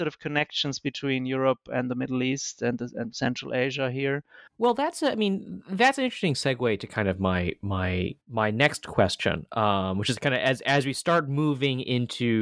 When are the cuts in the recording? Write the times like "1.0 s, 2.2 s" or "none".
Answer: 4.5 s, 8.2 s